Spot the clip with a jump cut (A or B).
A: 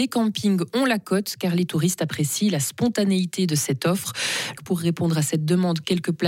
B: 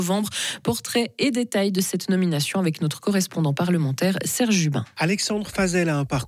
A